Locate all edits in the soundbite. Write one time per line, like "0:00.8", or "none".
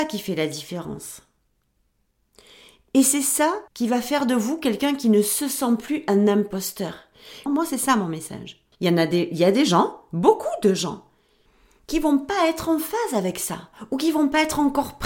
0:03.7
0:07.5
0:08.7